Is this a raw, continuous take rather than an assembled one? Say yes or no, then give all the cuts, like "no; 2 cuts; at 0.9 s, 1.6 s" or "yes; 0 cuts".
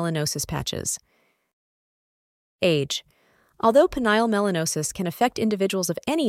yes; 0 cuts